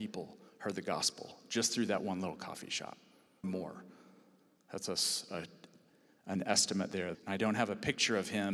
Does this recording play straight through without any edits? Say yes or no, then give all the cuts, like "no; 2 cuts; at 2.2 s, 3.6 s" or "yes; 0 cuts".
no; 2 cuts; at 3.4 s, 7.1 s